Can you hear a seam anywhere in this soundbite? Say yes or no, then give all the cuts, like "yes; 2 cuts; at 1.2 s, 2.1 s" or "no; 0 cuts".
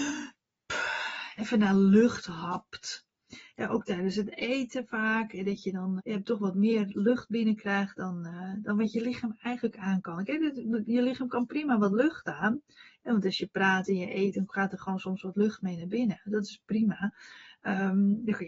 yes; 1 cut; at 6.0 s